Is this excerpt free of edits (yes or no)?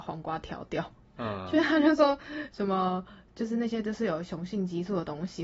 yes